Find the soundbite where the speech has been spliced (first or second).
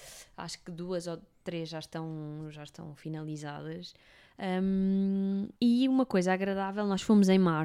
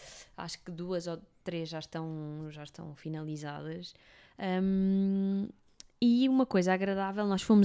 first